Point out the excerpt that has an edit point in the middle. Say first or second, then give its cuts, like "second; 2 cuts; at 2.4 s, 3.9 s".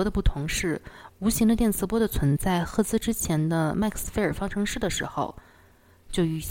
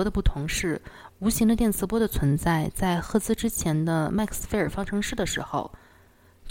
first; 1 cut; at 2.4 s